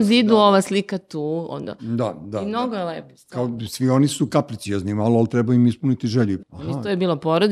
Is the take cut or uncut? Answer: cut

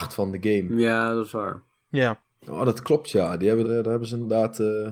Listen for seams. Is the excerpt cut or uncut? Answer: cut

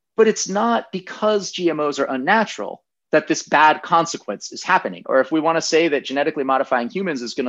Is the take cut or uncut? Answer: cut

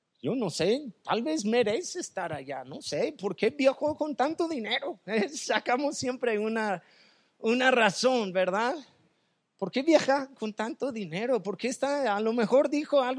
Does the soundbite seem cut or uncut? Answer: uncut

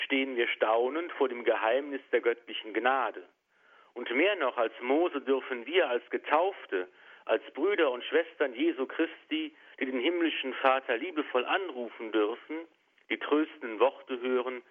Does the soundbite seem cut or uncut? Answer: uncut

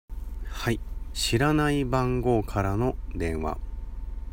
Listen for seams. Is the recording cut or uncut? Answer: cut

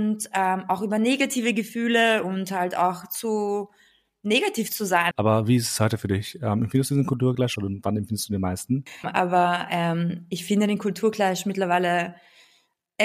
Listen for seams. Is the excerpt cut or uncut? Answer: cut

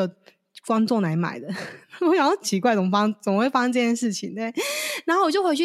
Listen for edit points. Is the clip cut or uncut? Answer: uncut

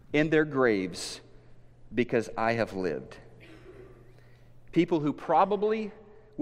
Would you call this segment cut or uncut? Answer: uncut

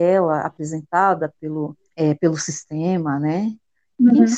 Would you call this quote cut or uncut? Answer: cut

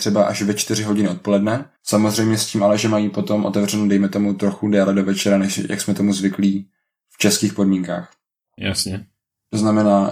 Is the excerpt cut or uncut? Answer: cut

